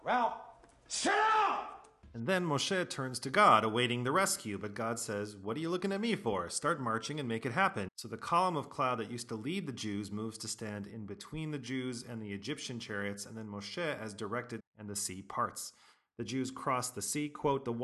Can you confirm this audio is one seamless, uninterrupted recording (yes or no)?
no